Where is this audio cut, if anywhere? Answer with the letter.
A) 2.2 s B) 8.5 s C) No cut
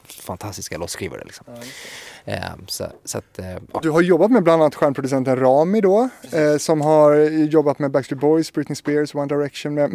C